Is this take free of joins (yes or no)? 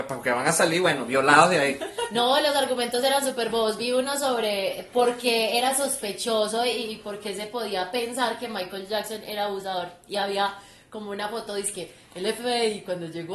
yes